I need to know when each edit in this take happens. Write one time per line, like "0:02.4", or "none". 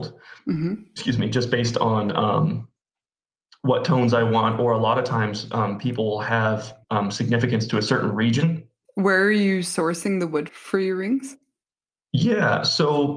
0:06.8
0:08.8
0:10.5